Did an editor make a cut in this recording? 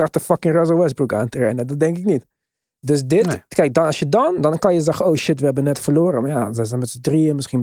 no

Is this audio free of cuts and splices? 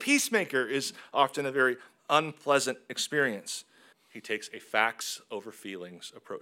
no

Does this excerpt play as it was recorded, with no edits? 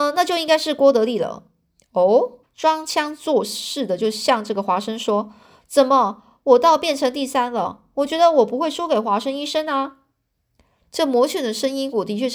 no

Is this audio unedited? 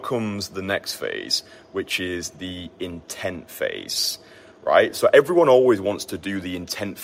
yes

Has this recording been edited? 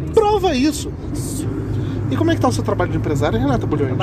yes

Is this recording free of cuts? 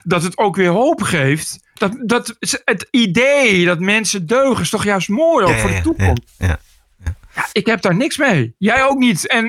no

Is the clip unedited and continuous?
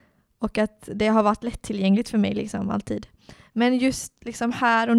yes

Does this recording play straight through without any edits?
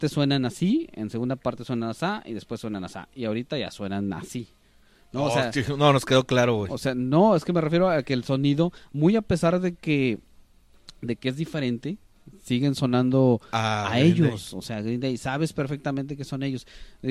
yes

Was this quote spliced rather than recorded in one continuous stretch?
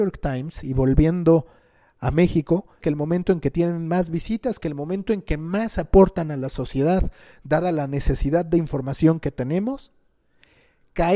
yes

